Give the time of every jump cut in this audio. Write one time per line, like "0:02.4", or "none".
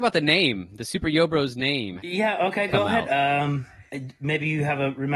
0:02.0